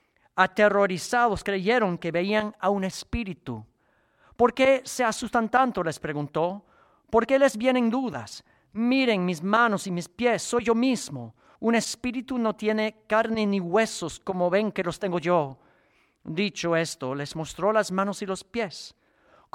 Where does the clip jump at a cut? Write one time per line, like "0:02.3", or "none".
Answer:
0:11.6